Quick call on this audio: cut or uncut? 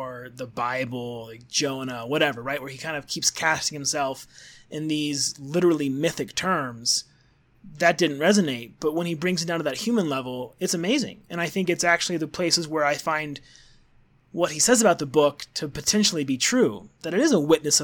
uncut